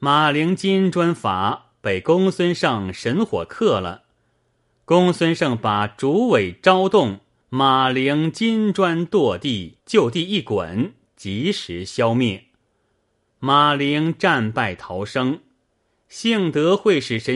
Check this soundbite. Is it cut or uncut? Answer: cut